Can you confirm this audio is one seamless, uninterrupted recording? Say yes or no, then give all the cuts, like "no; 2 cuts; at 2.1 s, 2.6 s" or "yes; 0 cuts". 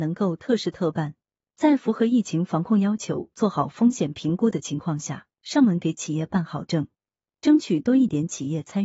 yes; 0 cuts